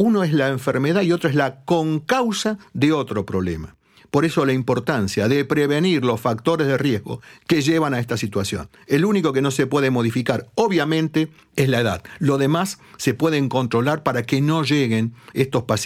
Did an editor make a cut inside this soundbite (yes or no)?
no